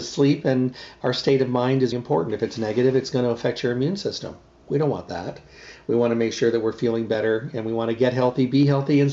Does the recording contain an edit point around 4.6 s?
no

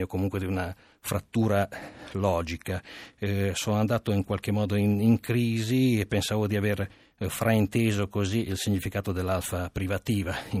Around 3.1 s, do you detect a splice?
no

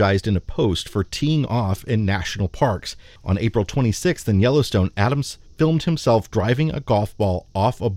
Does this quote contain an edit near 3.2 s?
yes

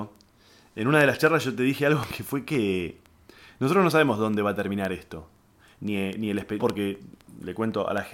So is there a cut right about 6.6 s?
yes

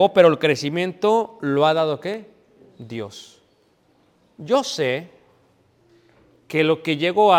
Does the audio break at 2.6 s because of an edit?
no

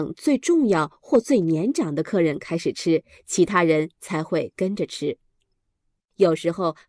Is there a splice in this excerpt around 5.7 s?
yes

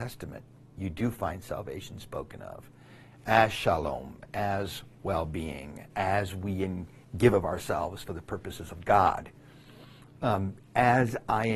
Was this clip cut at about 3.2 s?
no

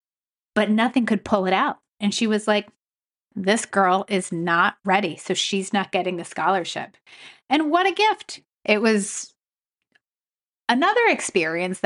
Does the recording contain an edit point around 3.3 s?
yes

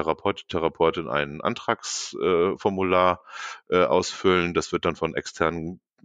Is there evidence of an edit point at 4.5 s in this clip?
no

